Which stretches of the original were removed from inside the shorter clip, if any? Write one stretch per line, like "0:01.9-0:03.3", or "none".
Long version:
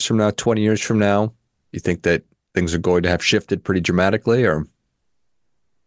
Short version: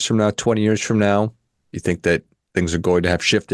none